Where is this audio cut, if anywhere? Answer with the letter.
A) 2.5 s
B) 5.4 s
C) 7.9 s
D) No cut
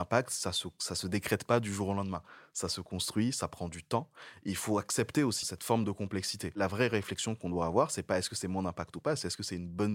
B